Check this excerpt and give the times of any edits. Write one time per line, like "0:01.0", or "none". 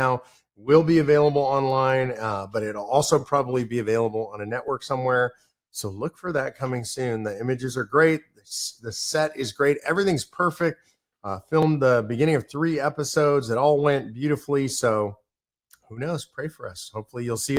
none